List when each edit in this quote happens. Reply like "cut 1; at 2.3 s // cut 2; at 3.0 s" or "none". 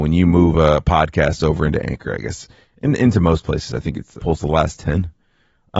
cut 1; at 4.2 s

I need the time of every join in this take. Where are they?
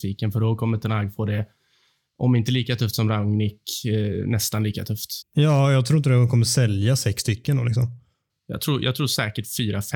cut 1; at 5.2 s

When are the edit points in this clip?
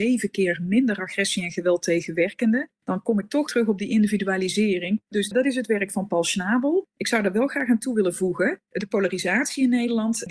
cut 1; at 3.5 s // cut 2; at 5.0 s

